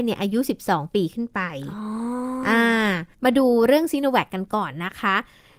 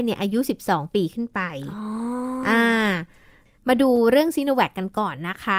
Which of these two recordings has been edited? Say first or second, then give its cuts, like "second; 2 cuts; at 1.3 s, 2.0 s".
first; 1 cut; at 3.1 s